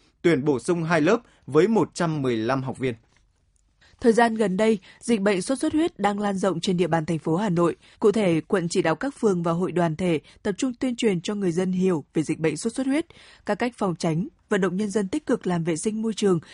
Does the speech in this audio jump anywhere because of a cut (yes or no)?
yes